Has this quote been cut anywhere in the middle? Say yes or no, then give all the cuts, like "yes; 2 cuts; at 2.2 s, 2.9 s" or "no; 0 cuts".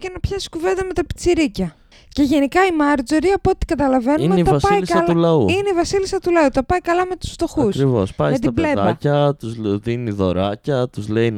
no; 0 cuts